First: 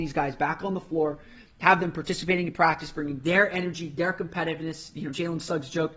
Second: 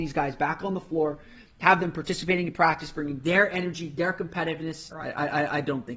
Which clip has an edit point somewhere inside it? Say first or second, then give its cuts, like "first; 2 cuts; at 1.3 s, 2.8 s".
second; 1 cut; at 4.9 s